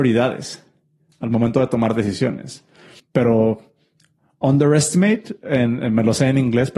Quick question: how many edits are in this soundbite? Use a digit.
1